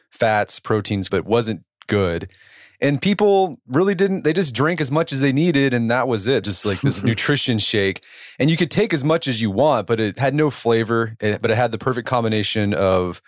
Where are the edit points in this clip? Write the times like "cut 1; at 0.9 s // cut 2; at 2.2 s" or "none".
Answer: cut 1; at 1.1 s // cut 2; at 6.4 s